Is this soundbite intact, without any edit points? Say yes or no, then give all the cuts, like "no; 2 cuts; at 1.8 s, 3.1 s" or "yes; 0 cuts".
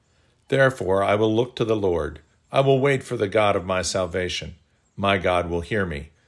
yes; 0 cuts